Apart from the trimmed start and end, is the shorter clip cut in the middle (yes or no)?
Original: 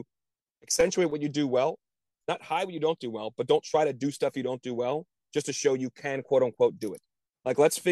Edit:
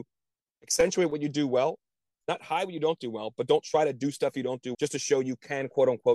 yes